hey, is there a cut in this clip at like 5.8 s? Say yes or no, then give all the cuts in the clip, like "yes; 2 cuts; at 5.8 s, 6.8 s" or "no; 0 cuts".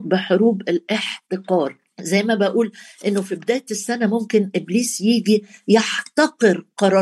no; 1 cut; at 1.9 s